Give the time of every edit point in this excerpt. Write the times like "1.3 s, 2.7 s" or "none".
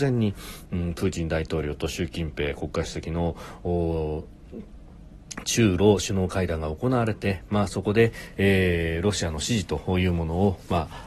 none